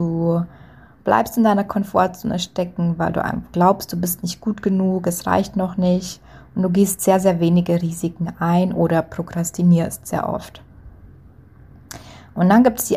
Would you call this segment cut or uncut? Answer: uncut